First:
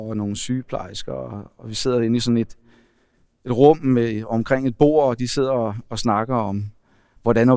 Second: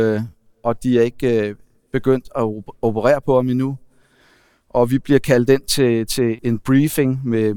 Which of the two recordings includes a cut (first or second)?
second